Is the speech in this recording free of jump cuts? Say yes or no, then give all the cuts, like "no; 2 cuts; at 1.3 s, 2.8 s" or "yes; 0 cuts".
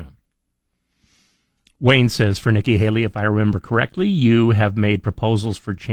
yes; 0 cuts